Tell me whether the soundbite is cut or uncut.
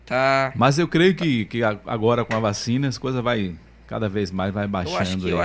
uncut